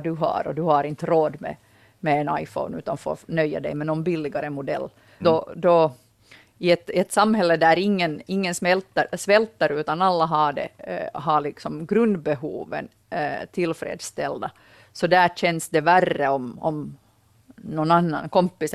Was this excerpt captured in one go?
no; 1 cut; at 5.2 s

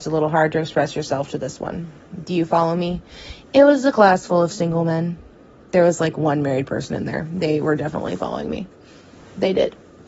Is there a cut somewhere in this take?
no; 0 cuts

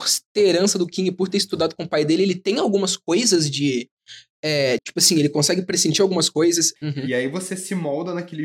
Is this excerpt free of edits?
no; 2 cuts; at 4.8 s, 6.8 s

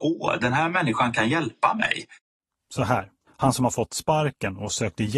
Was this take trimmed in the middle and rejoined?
yes; 1 cut; at 3.3 s

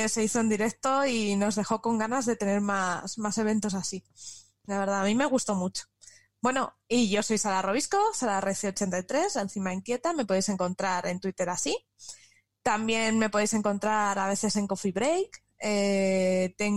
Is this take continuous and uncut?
yes; 0 cuts

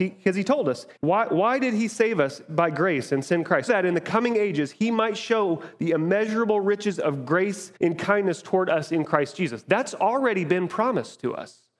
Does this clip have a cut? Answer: yes; 3 cuts; at 1.0 s, 3.7 s, 7.8 s

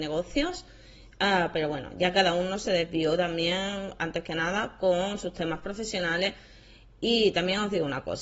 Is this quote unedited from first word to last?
yes; 0 cuts

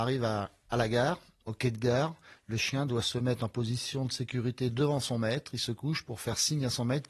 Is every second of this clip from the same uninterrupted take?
yes; 0 cuts

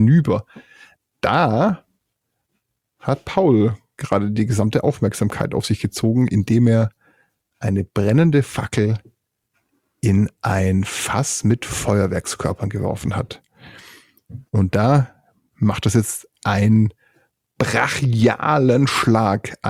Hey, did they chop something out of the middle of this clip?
yes; 1 cut; at 14.5 s

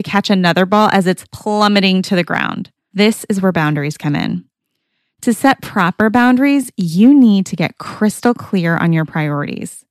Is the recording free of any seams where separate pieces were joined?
yes; 0 cuts

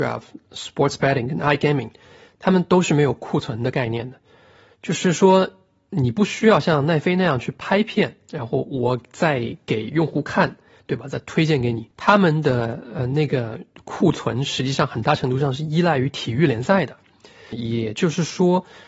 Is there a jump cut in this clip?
yes; 2 cuts; at 11.9 s, 17.5 s

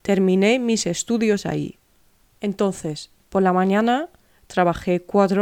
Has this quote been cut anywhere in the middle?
yes; 1 cut; at 2.2 s

